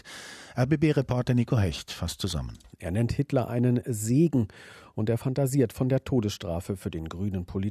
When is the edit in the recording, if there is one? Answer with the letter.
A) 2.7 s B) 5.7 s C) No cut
A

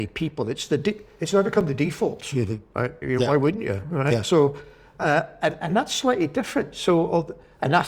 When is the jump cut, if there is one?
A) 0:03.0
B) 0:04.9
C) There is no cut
A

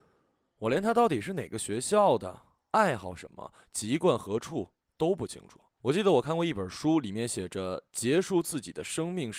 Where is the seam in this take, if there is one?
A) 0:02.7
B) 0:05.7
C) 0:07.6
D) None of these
B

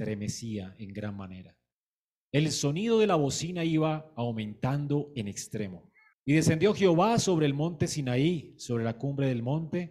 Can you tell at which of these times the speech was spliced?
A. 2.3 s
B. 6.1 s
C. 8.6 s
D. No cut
B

